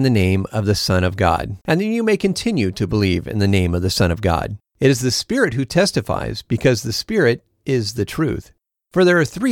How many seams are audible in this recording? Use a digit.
2